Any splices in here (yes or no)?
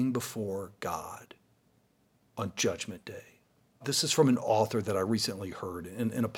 yes